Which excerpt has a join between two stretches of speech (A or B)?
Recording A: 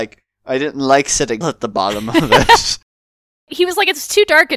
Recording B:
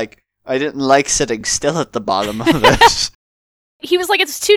A